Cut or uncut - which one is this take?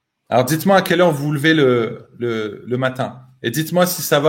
uncut